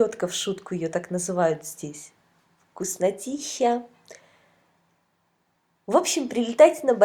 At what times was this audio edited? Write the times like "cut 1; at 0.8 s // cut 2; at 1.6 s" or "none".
none